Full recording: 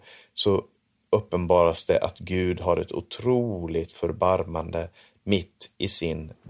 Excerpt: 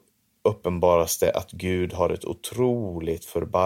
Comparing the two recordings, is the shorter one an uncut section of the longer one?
yes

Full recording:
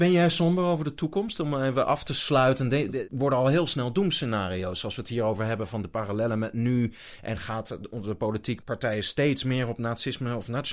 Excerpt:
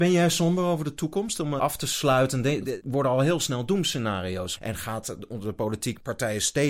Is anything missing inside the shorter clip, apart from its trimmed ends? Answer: yes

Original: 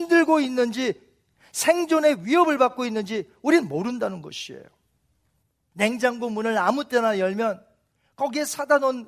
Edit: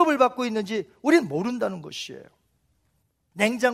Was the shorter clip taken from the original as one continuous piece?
yes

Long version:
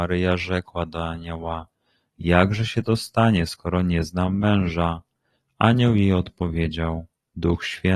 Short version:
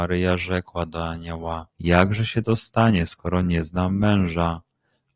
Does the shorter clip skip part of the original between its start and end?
yes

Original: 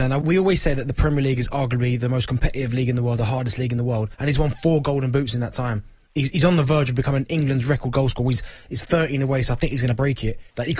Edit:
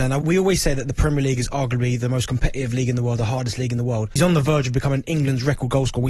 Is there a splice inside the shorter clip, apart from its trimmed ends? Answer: yes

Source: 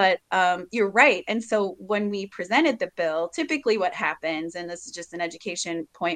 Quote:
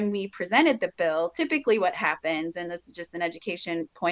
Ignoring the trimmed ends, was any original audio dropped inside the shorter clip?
no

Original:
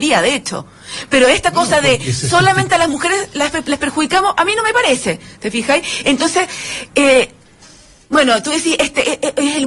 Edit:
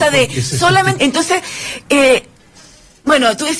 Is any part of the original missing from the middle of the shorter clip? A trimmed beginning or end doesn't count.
yes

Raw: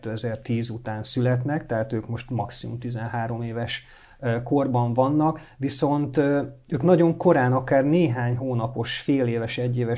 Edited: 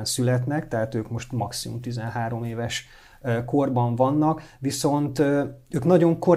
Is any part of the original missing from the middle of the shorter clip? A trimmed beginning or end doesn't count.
no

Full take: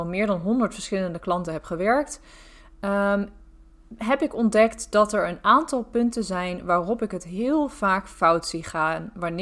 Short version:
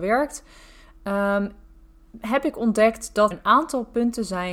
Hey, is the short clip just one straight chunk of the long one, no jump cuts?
no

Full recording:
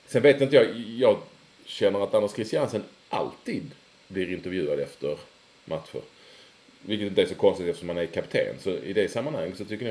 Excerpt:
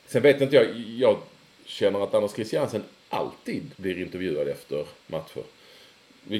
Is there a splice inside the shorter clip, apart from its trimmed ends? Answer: yes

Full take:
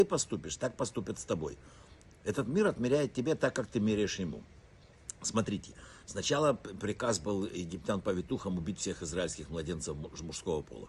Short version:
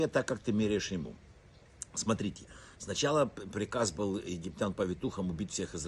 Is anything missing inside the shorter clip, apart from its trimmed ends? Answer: no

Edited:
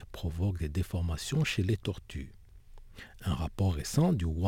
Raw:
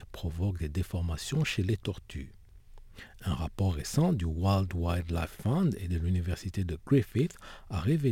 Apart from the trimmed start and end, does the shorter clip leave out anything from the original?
no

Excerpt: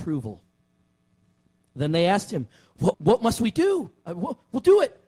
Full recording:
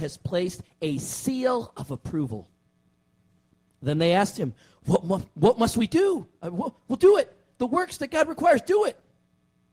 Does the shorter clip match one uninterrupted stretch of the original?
no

